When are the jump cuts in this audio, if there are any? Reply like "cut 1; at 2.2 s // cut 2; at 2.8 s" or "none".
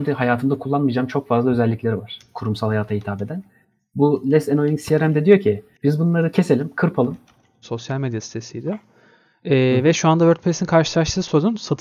cut 1; at 5.7 s // cut 2; at 7.6 s